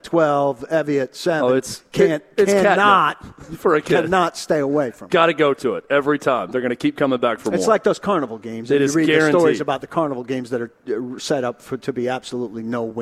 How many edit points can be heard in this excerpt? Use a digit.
0